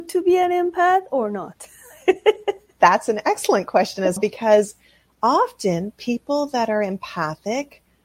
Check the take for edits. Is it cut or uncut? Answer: cut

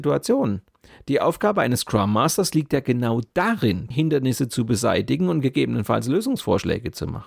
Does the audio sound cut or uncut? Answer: cut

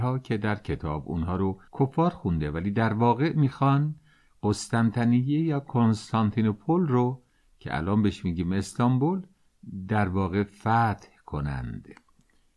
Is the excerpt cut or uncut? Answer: cut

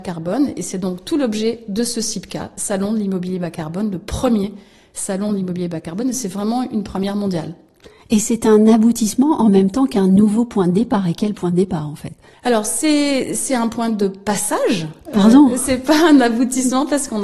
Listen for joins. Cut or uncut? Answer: uncut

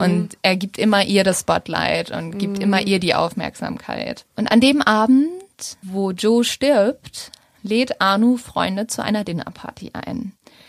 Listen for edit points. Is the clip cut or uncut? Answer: uncut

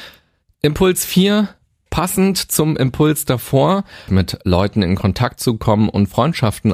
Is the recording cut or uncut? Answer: cut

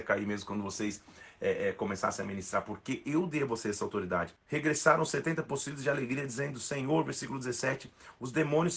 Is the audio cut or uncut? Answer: cut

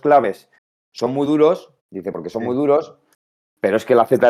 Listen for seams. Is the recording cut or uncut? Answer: cut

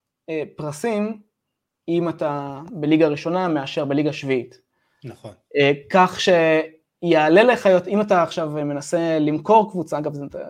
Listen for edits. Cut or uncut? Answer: uncut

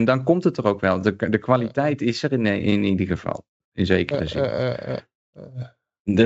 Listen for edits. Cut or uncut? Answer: uncut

